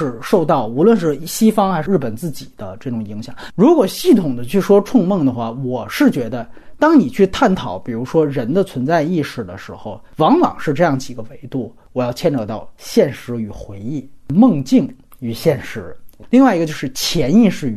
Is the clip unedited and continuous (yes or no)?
yes